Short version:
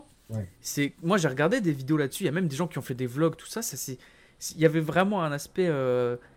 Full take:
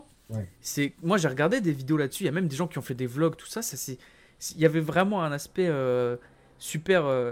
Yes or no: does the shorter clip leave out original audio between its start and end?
no